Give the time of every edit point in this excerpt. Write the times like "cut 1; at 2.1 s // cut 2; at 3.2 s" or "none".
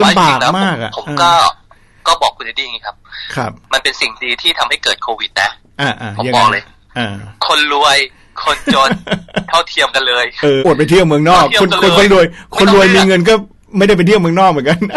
cut 1; at 10.6 s